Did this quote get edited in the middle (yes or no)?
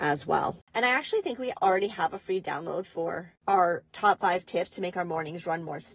yes